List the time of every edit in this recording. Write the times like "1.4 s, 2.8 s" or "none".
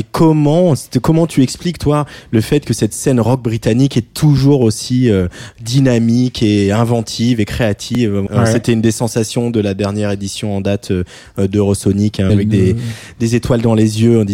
8.3 s, 12.3 s